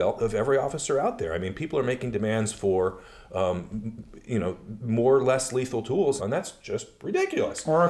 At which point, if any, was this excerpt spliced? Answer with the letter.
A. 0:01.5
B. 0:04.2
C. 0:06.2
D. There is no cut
C